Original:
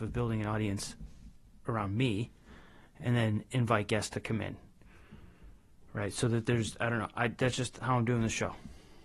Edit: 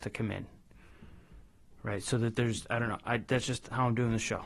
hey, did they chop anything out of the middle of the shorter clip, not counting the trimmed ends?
no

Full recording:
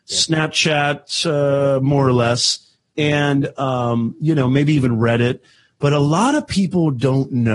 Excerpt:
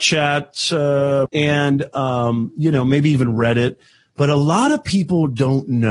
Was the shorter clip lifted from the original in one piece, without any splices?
no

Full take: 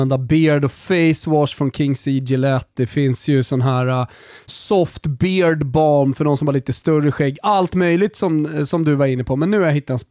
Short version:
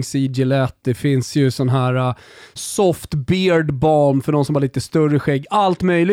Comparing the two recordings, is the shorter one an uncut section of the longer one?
yes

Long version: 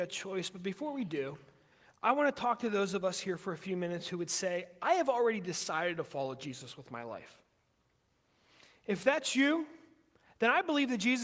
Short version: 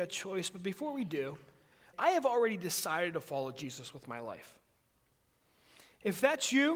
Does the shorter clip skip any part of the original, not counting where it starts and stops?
yes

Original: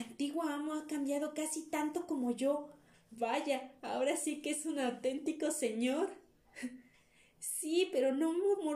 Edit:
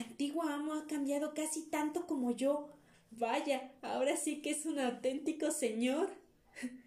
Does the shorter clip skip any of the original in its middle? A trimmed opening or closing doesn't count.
no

